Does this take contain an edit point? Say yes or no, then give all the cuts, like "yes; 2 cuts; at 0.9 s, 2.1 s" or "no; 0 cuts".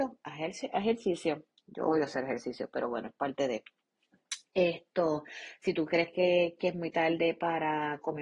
no; 0 cuts